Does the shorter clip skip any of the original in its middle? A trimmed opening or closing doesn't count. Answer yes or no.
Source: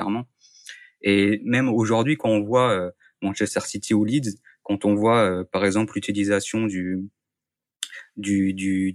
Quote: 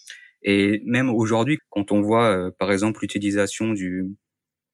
yes